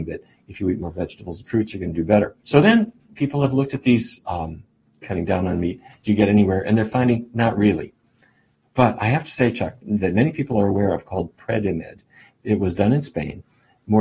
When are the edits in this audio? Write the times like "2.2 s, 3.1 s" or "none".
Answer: 2.4 s, 5.0 s, 9.8 s